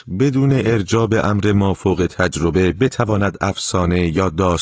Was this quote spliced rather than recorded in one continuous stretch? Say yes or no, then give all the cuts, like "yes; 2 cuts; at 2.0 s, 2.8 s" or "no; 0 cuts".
no; 0 cuts